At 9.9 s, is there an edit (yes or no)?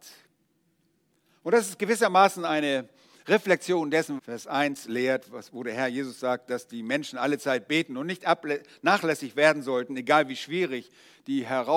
no